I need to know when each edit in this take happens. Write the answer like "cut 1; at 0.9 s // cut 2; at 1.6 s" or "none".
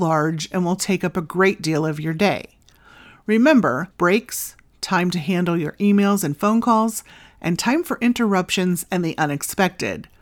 cut 1; at 3.9 s

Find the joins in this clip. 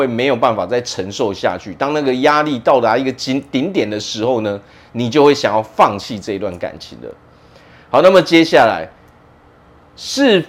none

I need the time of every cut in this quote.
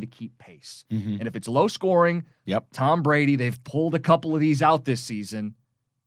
cut 1; at 2.5 s

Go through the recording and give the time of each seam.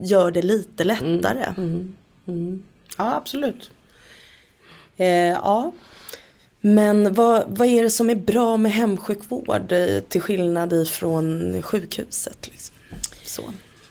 none

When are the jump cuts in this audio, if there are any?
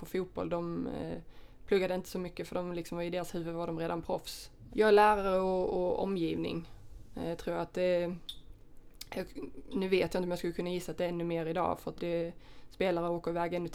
cut 1; at 4.7 s // cut 2; at 12.0 s

